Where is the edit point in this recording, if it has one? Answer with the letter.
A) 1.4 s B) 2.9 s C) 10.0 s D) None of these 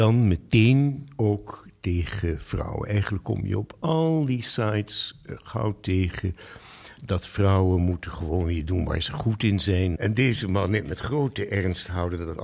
C